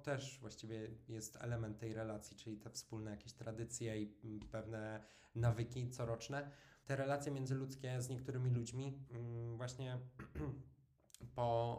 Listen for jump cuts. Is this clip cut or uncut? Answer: cut